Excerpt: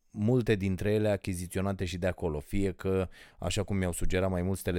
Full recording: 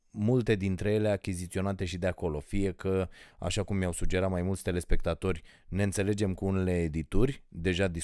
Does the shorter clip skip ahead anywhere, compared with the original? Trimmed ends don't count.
no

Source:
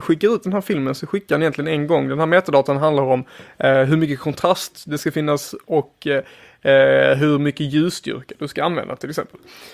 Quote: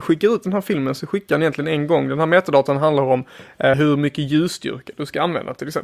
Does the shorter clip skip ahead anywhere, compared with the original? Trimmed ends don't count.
yes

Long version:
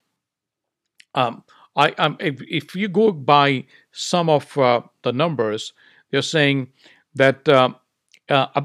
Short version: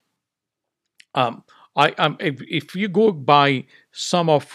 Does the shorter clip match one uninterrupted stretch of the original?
yes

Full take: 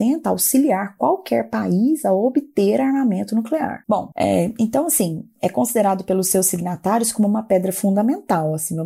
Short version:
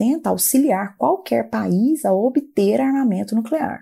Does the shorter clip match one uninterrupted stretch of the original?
yes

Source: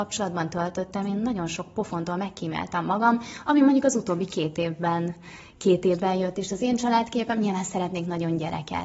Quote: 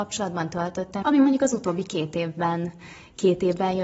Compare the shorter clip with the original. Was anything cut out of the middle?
yes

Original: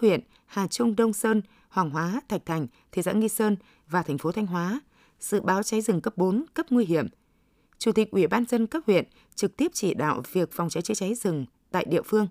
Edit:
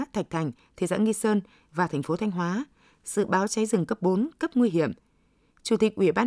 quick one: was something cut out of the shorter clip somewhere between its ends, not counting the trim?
no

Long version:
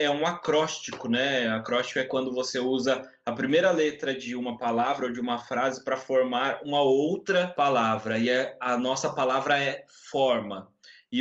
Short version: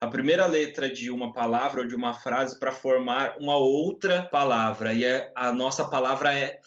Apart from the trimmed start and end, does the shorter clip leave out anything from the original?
no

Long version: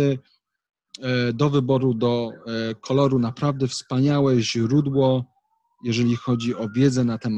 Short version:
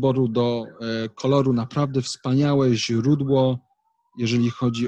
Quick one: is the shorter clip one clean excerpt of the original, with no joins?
yes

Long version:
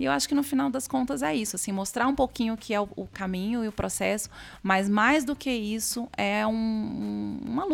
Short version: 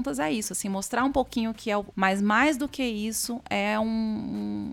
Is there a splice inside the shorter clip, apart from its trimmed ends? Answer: yes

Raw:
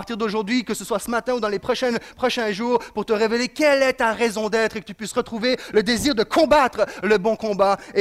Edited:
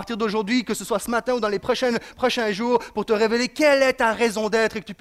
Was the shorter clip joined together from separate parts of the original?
no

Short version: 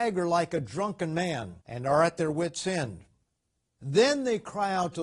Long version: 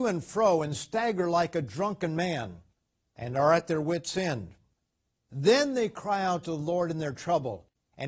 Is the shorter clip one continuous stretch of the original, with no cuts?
no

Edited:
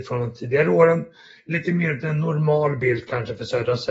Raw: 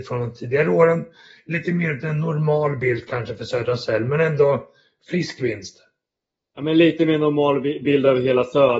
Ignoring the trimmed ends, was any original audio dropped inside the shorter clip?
no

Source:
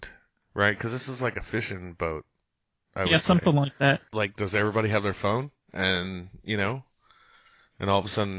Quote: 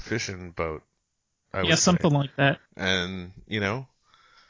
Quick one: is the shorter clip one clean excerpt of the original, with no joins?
no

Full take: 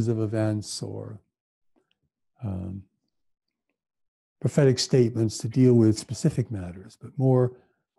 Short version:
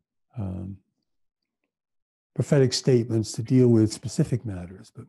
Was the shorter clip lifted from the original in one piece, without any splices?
yes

